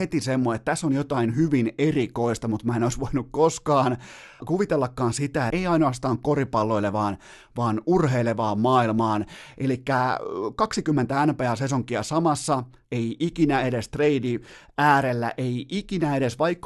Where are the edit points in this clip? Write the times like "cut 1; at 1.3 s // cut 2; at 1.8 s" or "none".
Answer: cut 1; at 4.4 s // cut 2; at 5.5 s // cut 3; at 12.8 s